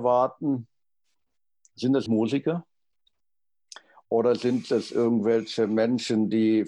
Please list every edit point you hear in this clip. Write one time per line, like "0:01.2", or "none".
0:02.1